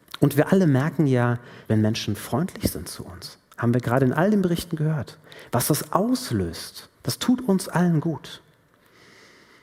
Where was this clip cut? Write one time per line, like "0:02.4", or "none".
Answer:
0:01.7
0:06.9

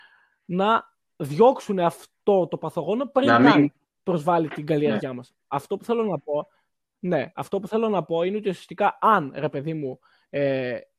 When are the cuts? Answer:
none

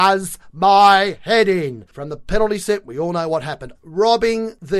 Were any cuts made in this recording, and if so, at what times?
0:01.9
0:03.7

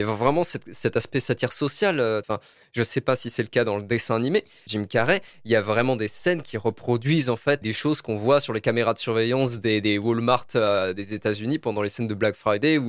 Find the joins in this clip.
0:02.2
0:04.7
0:07.6

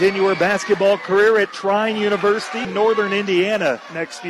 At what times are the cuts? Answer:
0:02.6

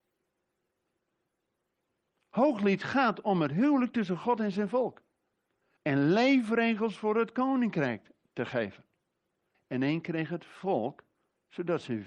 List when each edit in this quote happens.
0:05.8
0:09.5

